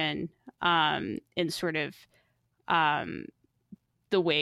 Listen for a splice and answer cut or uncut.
uncut